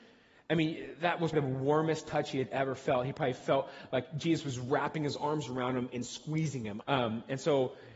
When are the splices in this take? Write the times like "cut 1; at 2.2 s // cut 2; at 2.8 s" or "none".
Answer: cut 1; at 1.3 s // cut 2; at 6.8 s